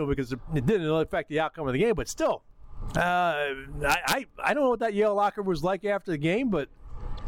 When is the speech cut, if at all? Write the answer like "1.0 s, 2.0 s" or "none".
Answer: 2.9 s